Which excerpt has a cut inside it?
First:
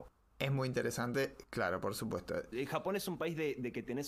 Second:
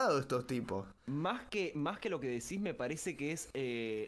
first; 1 cut; at 2.5 s

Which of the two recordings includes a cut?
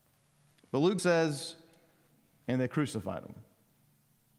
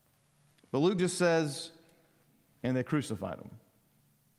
first; 1 cut; at 1.0 s

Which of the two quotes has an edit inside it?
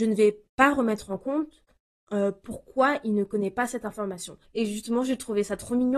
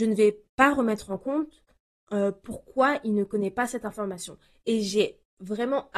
first; 1 cut; at 4.4 s

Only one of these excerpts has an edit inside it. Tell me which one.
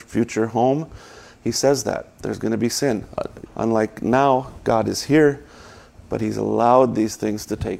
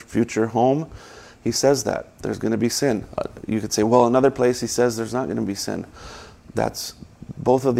first; 1 cut; at 3.5 s

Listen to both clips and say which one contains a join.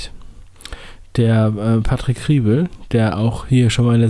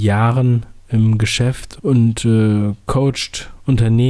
second; 1 cut; at 1.8 s

